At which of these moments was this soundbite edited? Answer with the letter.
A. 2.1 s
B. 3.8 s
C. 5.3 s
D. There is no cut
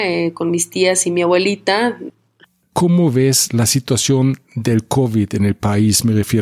A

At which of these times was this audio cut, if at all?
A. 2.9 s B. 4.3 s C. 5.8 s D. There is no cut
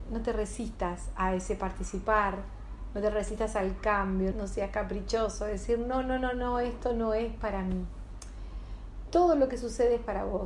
B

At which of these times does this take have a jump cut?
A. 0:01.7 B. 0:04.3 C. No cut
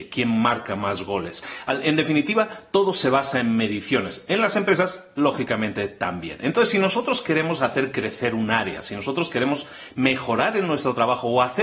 C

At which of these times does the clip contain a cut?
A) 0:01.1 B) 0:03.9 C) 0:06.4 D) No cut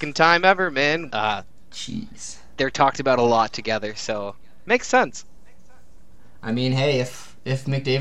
A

